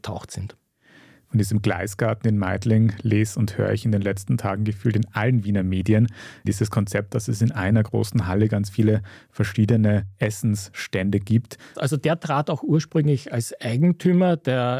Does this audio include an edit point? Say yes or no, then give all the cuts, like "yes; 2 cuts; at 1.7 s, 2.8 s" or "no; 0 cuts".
yes; 2 cuts; at 6.4 s, 11.7 s